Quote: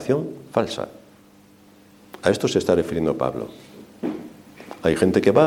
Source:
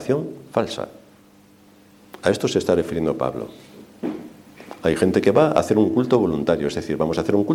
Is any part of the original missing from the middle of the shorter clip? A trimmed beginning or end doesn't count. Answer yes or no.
no